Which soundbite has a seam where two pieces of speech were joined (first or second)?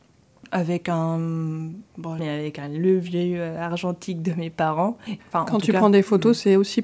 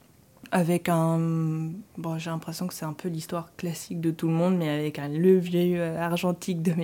first